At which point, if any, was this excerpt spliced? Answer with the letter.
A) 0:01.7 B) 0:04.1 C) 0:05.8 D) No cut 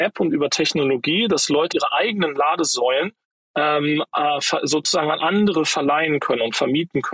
A